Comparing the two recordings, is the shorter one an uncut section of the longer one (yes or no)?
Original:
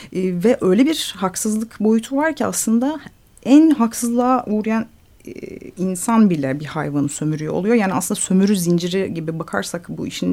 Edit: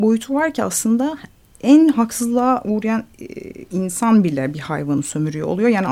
no